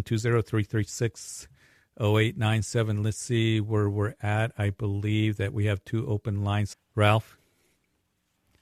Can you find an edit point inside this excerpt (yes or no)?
yes